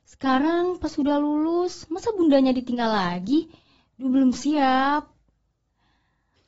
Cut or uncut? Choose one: uncut